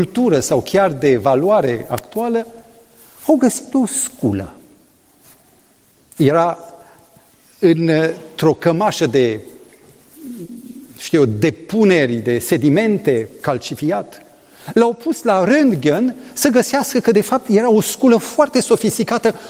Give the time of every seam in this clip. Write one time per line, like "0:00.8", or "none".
none